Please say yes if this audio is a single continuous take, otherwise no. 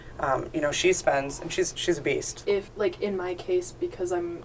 no